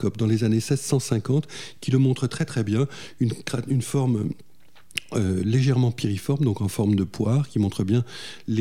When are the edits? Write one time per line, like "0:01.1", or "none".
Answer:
none